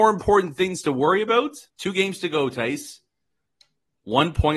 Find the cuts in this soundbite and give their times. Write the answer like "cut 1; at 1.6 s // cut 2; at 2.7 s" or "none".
cut 1; at 1.7 s